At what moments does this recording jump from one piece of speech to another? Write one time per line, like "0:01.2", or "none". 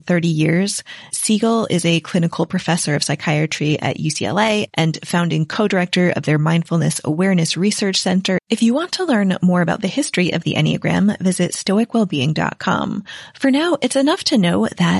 0:01.1
0:08.4